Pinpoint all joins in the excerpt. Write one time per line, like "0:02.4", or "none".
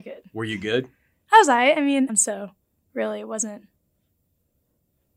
0:02.1